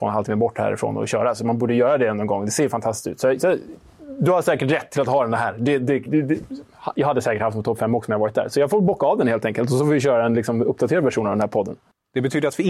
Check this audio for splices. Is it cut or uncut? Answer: cut